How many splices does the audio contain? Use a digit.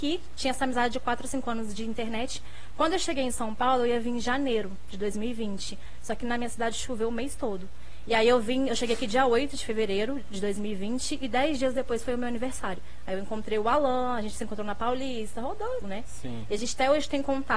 1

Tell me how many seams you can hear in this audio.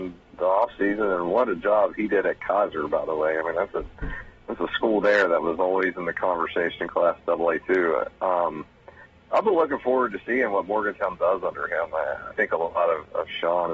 1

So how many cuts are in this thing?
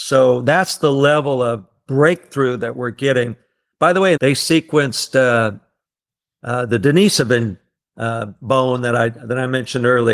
1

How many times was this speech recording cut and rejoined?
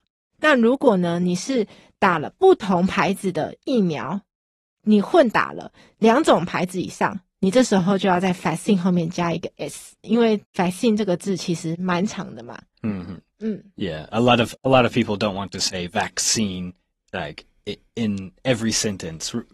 1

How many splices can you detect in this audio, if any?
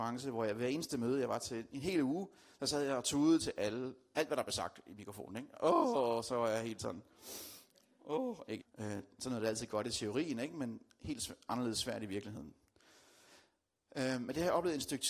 1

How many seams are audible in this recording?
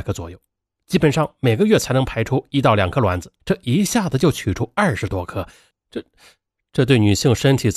1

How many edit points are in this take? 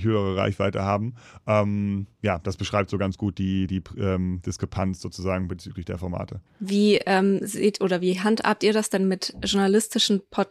1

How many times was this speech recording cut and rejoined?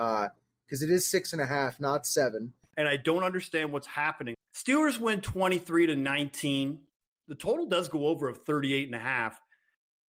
2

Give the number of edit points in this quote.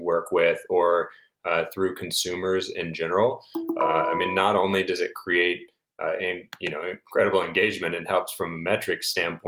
0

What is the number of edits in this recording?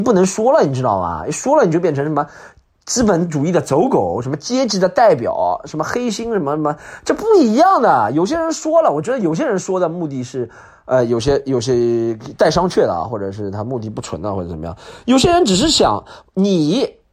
0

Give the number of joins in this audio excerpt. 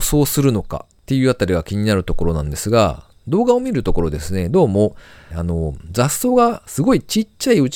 1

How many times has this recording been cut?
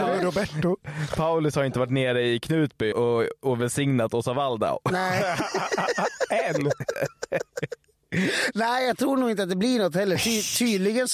1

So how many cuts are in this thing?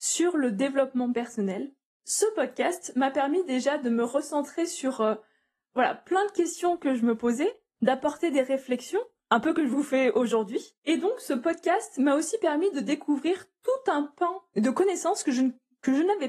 0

